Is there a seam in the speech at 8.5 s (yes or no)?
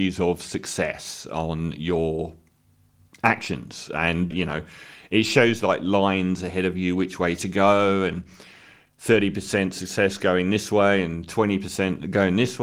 no